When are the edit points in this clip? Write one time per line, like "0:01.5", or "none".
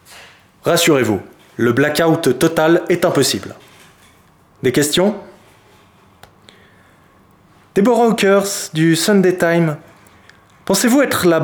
none

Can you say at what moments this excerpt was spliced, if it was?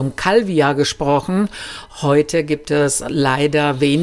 none

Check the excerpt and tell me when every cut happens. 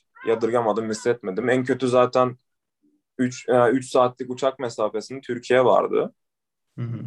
none

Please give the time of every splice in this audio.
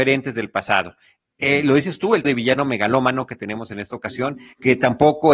0:02.2

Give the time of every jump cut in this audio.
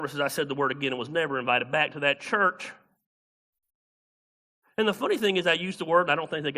none

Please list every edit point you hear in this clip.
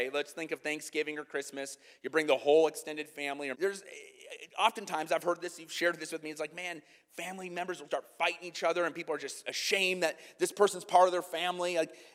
0:03.5
0:07.9

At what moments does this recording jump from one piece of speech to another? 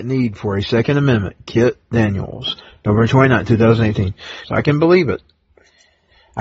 0:04.4

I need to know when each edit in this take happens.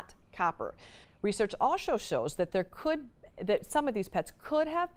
0:01.0

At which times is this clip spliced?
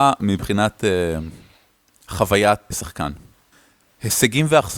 0:02.7

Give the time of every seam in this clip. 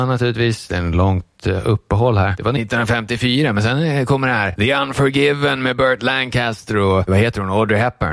none

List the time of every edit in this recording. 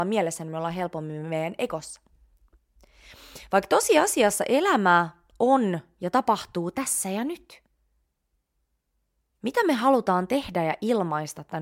none

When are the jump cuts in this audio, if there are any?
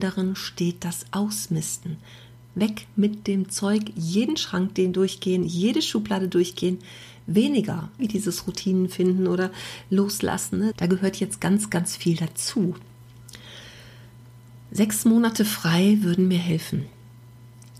0:08.0
0:10.7

